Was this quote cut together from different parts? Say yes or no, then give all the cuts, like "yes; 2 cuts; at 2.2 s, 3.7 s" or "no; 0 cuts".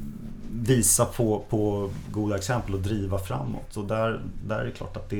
no; 0 cuts